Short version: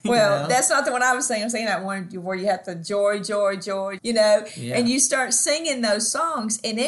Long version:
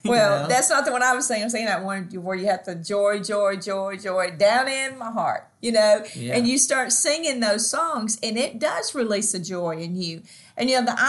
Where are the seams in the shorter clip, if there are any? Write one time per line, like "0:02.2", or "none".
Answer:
0:04.0